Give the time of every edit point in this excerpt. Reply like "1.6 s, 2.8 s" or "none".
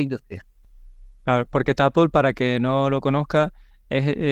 none